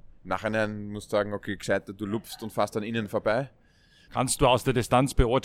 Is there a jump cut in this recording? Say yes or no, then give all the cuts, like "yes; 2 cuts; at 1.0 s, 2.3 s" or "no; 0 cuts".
yes; 1 cut; at 4.1 s